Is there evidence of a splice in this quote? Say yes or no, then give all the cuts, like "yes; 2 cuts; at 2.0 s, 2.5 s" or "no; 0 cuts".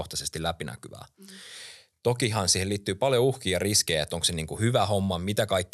no; 0 cuts